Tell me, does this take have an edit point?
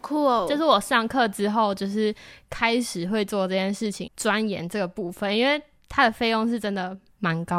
yes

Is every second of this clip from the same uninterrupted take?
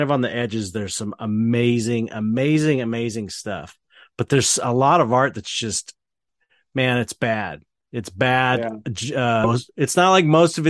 no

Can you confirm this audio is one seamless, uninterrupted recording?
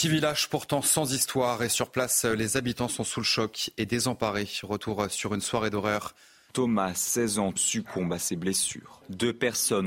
no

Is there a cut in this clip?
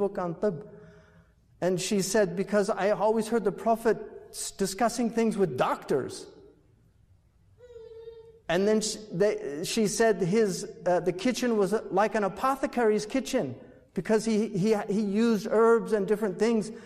no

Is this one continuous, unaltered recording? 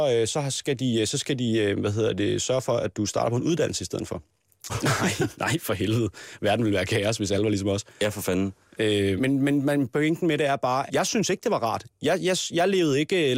no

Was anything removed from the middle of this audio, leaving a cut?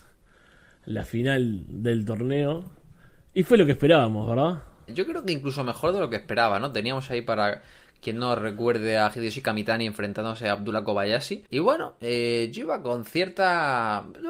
yes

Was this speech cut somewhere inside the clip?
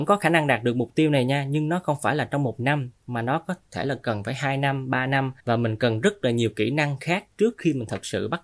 yes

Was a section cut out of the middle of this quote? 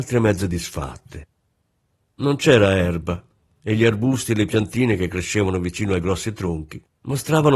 no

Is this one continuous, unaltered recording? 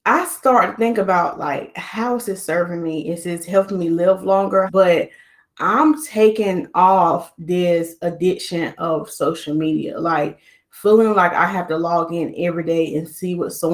no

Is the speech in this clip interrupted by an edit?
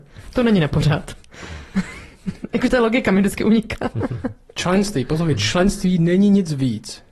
no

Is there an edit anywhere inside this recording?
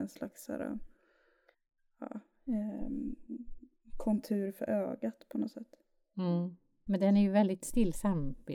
yes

